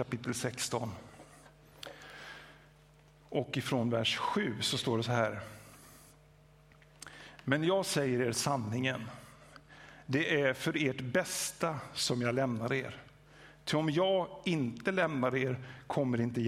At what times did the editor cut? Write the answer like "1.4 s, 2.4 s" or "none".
none